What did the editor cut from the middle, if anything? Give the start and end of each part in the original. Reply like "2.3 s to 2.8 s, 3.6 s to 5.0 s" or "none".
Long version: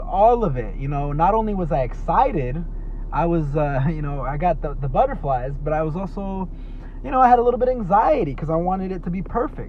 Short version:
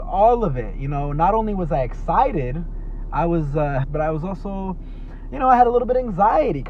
3.8 s to 5.6 s